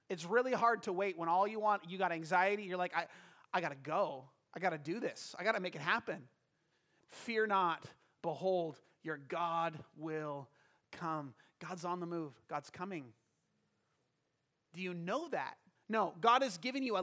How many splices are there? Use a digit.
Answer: 2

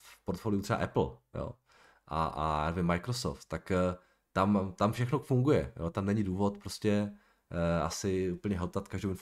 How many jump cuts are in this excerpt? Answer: 0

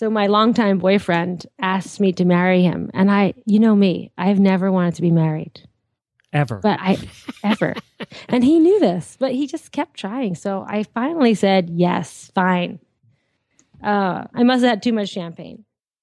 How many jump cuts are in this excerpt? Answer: 1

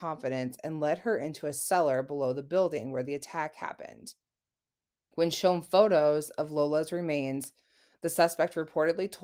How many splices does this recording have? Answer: 1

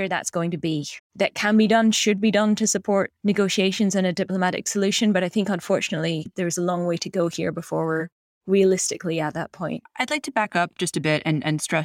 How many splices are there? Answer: 1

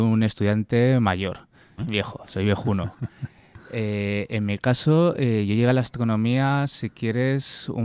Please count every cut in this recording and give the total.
1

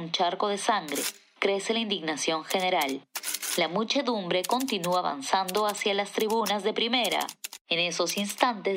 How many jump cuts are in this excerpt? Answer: 0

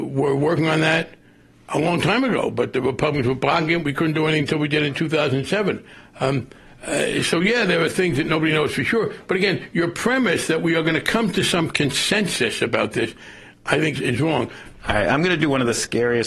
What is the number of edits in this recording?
1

